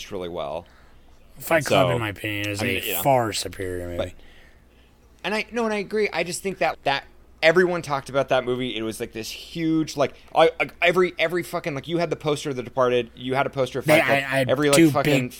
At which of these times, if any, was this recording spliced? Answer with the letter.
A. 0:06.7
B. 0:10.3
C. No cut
A